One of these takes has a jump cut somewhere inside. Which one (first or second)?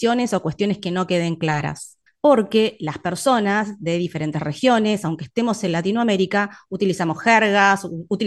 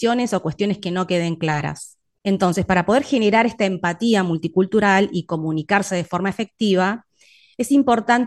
first